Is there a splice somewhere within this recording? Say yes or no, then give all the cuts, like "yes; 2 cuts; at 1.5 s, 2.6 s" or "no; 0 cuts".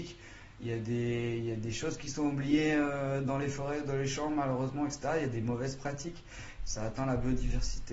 yes; 1 cut; at 6.6 s